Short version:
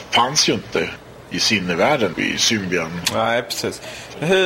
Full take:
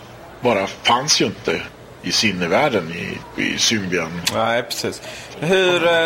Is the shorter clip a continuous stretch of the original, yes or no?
no